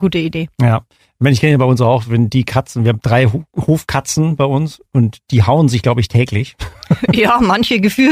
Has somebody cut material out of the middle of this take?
no; 0 cuts

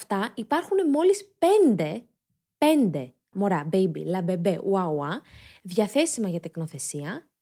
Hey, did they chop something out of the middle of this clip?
yes; 1 cut; at 3.3 s

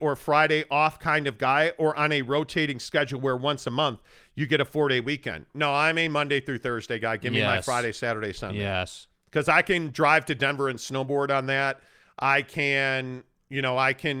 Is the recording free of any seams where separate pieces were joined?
yes; 0 cuts

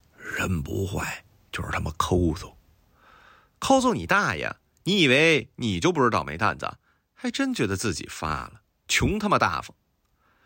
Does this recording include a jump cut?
no; 0 cuts

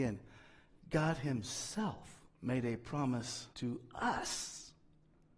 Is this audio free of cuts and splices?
no; 2 cuts; at 2.3 s, 3.5 s

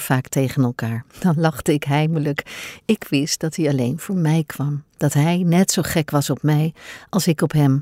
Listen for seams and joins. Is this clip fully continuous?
yes; 0 cuts

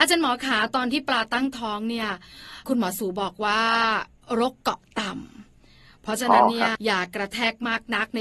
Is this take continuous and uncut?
no; 1 cut; at 6.8 s

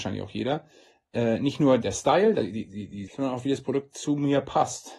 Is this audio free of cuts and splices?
no; 2 cuts; at 1.8 s, 3.1 s

